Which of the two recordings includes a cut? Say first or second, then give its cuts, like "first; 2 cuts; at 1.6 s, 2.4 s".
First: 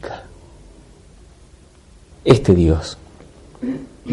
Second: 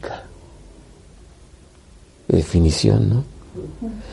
first; 1 cut; at 2.1 s